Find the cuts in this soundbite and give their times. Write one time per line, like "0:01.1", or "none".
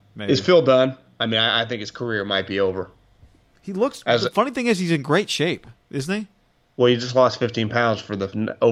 none